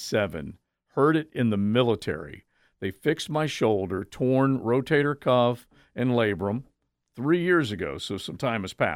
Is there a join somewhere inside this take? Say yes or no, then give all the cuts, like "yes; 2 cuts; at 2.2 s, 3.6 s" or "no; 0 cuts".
no; 0 cuts